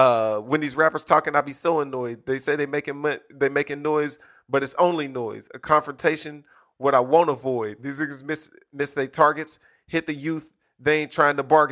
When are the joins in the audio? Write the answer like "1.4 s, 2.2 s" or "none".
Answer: 7.8 s